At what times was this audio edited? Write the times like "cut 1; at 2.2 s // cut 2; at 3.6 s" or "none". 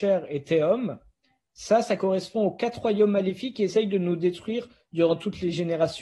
none